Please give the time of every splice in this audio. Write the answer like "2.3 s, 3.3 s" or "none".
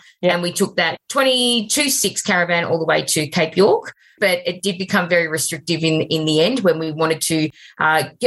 4.2 s

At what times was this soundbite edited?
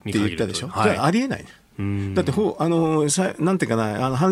none

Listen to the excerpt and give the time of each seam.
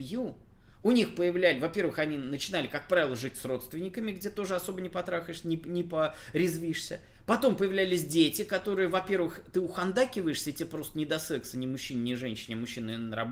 none

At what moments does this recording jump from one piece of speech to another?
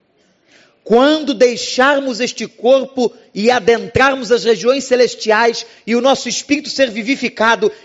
none

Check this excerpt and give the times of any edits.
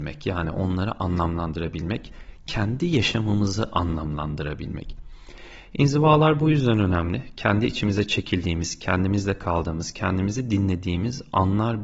none

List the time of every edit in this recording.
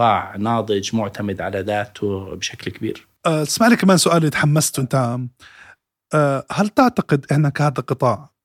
3.2 s

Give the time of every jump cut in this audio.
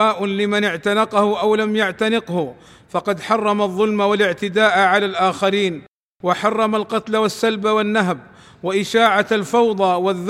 none

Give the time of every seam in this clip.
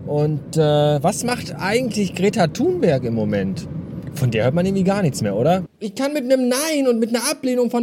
5.7 s

